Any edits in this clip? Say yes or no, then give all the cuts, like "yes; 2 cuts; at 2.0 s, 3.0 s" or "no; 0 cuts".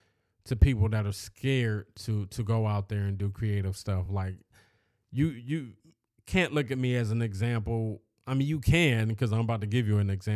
no; 0 cuts